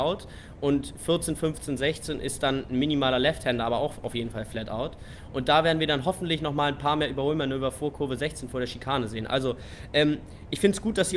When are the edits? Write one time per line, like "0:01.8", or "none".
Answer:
none